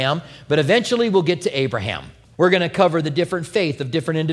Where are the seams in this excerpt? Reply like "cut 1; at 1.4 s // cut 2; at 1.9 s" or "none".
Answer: cut 1; at 2.3 s